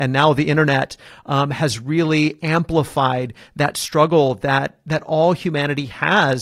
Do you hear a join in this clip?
no; 0 cuts

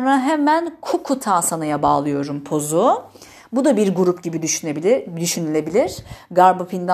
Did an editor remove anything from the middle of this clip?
no; 0 cuts

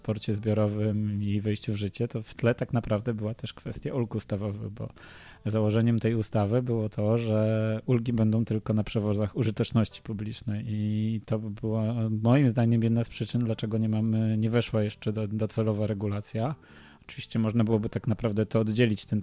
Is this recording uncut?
yes; 0 cuts

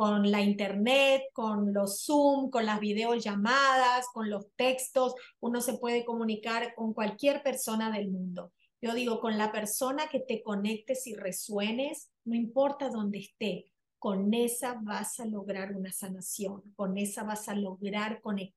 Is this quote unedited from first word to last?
yes; 0 cuts

